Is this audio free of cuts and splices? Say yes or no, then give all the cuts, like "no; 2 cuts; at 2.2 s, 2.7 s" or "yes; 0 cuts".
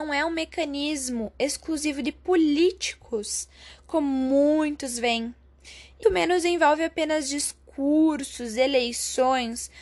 no; 1 cut; at 6.0 s